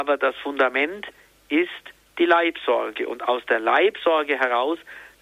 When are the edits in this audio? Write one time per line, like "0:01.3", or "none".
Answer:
none